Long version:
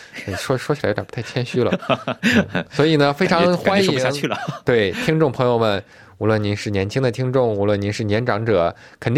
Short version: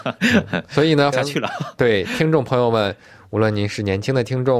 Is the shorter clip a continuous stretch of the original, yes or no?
no